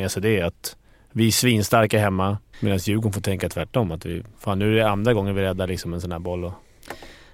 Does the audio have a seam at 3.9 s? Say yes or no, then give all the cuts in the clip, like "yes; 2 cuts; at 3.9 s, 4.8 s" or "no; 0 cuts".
no; 1 cut; at 2.5 s